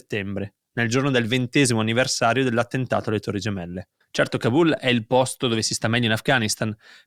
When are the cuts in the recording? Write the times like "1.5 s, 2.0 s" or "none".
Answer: 4.0 s